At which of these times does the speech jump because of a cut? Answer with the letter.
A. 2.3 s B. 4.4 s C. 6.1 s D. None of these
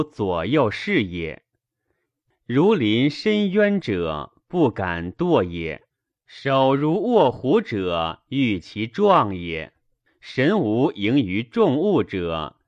A